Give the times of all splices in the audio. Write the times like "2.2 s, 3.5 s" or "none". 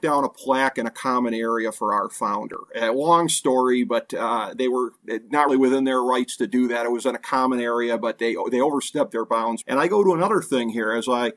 5.5 s, 9.6 s